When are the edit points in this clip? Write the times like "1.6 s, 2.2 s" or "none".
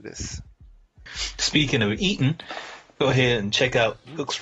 1.1 s